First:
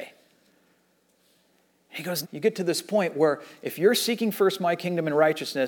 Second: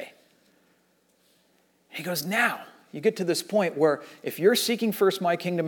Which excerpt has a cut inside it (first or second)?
first